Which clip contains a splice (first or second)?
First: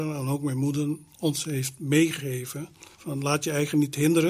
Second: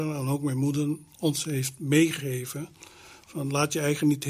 first